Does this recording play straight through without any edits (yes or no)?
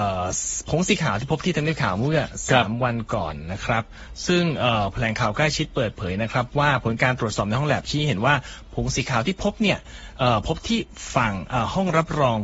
yes